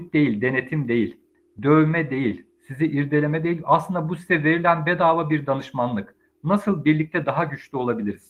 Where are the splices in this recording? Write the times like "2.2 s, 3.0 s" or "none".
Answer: none